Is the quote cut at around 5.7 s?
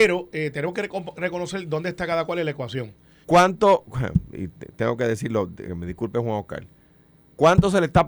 yes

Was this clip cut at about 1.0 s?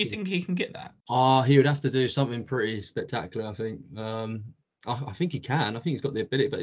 yes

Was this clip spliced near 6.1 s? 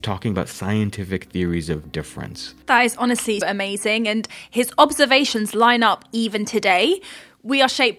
no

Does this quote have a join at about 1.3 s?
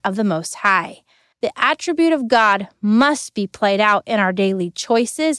yes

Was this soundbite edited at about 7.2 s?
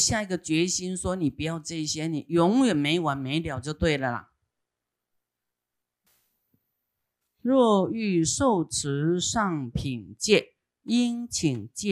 yes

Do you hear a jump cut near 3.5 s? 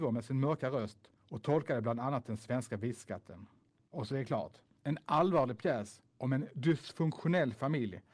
no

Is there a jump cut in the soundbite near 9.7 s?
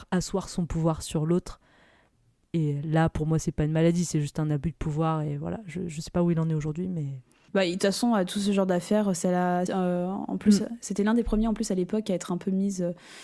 yes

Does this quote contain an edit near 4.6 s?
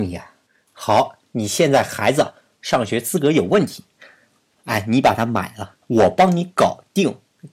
yes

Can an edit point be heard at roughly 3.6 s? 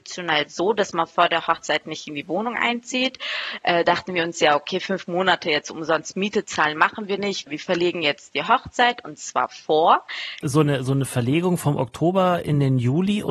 no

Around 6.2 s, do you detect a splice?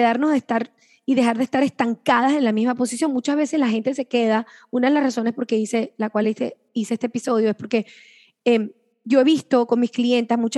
no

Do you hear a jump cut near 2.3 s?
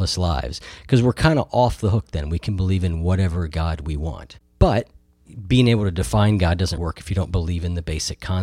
no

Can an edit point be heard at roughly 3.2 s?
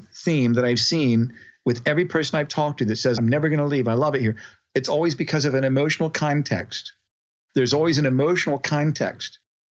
no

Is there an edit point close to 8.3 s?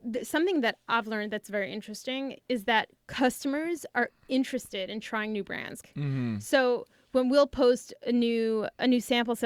no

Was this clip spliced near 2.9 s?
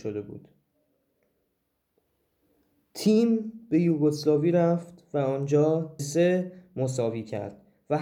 no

